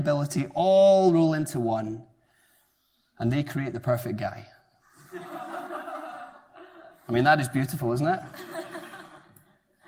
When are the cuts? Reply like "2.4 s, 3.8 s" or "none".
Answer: none